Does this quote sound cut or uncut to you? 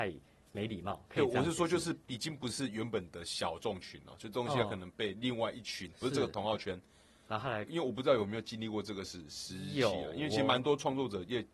cut